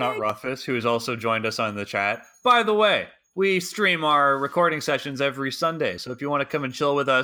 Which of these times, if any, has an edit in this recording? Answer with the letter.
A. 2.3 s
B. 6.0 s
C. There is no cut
C